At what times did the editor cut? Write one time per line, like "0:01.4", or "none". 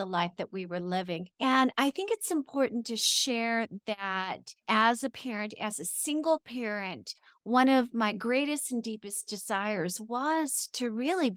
0:01.3